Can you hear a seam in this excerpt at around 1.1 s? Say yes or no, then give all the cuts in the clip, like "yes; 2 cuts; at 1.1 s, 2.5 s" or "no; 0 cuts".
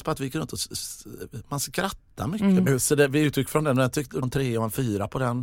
no; 2 cuts; at 2.7 s, 4.2 s